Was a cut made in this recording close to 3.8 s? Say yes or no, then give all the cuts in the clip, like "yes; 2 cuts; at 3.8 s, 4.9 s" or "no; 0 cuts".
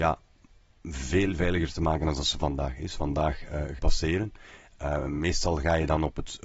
yes; 1 cut; at 3.8 s